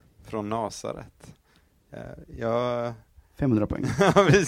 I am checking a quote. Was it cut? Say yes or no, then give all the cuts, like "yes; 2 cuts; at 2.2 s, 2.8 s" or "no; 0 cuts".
no; 0 cuts